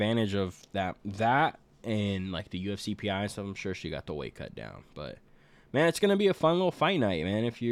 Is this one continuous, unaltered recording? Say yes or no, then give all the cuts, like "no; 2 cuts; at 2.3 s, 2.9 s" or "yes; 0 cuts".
yes; 0 cuts